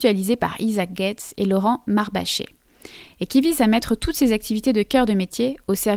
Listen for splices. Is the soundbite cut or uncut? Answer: uncut